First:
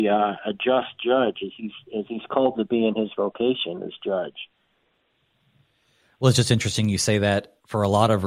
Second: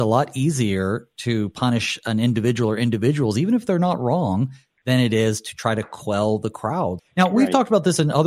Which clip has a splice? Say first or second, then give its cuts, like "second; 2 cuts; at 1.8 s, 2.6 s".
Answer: second; 1 cut; at 7.0 s